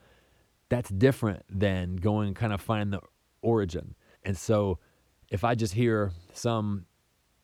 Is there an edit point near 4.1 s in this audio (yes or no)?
yes